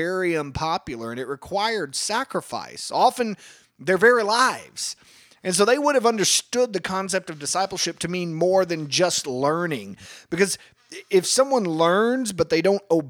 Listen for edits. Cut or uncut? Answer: uncut